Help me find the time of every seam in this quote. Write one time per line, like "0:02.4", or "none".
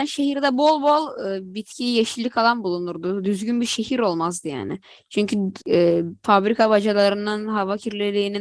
0:05.6